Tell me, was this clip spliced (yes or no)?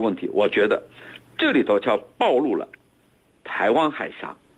yes